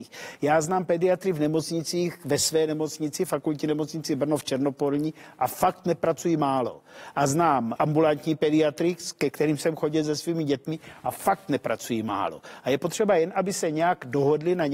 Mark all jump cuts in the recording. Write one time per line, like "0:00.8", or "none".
0:07.8